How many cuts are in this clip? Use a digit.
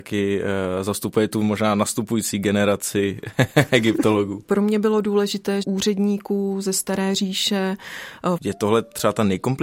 3